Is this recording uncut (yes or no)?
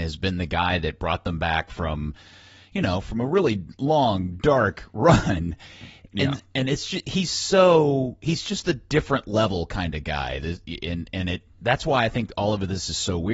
yes